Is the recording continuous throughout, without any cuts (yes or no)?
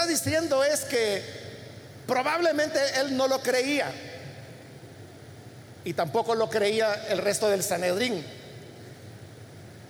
no